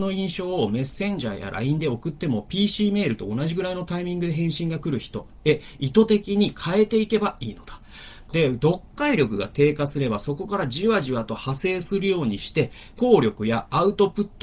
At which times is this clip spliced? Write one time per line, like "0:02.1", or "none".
0:08.3
0:13.0

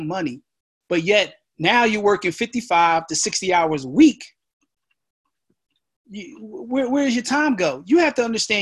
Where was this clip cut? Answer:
none

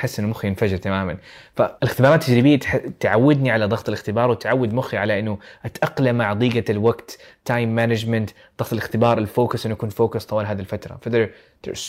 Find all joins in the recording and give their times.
0:01.8

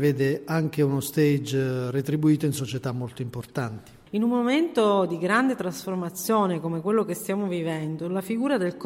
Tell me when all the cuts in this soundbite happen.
0:04.1

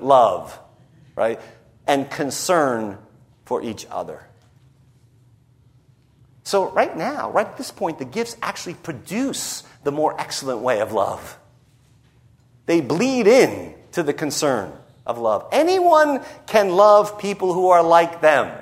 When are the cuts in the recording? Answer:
none

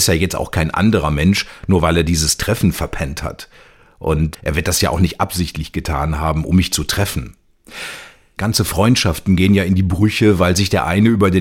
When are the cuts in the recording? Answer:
0:04.3
0:08.4

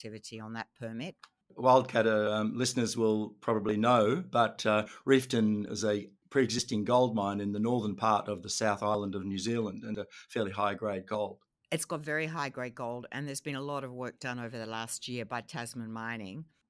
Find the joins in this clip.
0:01.4

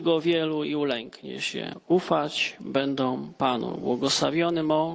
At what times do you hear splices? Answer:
none

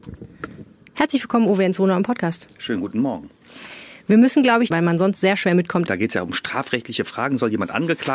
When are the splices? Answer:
0:04.7
0:05.9

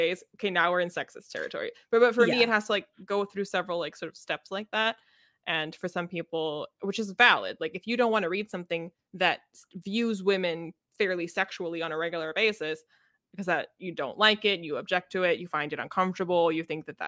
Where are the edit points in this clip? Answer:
none

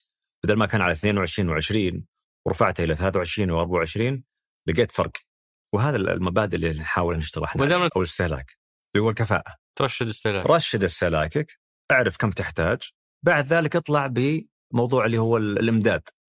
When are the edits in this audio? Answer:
0:07.9

